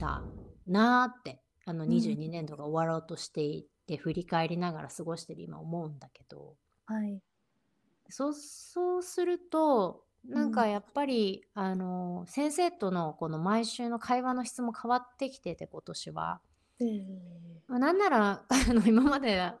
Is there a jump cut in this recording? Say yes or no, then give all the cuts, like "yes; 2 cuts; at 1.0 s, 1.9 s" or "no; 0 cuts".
no; 0 cuts